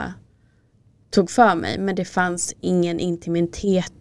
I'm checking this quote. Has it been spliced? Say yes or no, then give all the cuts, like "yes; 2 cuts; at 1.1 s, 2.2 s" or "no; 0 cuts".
no; 0 cuts